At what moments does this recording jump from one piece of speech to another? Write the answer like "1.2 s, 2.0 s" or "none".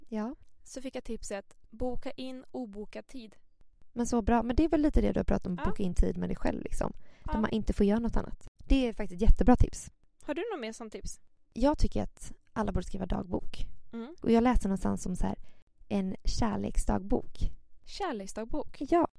8.6 s, 14.2 s, 17.8 s

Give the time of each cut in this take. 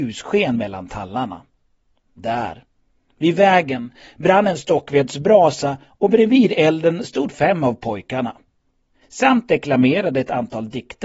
8.9 s

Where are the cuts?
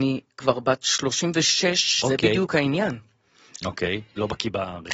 2.0 s, 3.6 s

